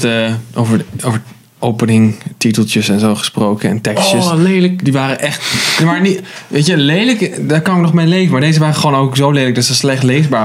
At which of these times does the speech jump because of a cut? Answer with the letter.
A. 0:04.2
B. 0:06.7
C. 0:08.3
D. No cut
D